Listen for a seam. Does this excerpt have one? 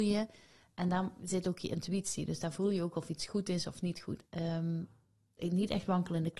yes; 1 cut; at 4.3 s

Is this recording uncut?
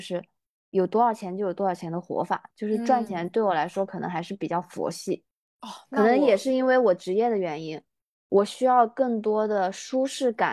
yes; 0 cuts

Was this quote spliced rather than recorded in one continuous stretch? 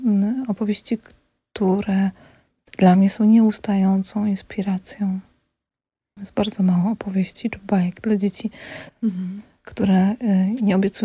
yes; 2 cuts; at 6.2 s, 8.9 s

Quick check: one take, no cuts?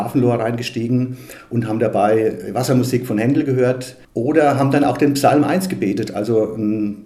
no; 1 cut; at 4.0 s

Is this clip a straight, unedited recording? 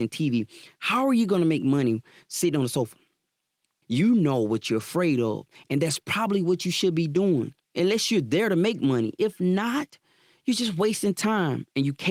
no; 2 cuts; at 3.8 s, 7.6 s

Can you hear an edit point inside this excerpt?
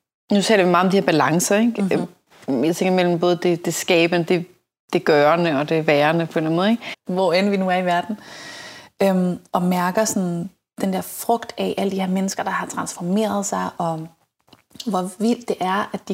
yes; 1 cut; at 6.9 s

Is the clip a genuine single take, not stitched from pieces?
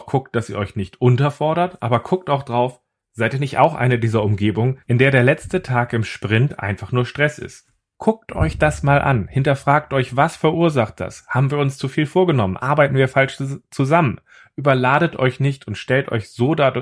yes; 0 cuts

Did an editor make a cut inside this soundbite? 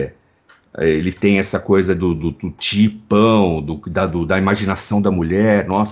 no; 0 cuts

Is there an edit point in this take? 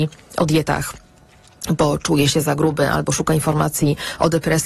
no; 0 cuts

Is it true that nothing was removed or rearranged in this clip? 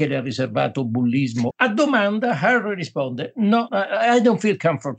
no; 2 cuts; at 1.5 s, 3.7 s

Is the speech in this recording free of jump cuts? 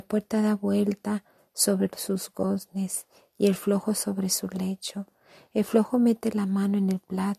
yes; 0 cuts

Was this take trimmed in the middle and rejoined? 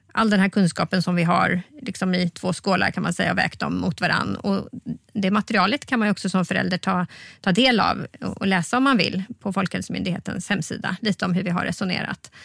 no; 0 cuts

